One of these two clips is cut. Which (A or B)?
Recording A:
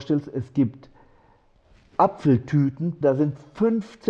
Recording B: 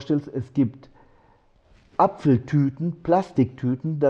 A